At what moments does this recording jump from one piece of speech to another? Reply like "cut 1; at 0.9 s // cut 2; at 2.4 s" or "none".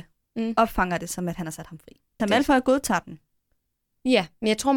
cut 1; at 2.2 s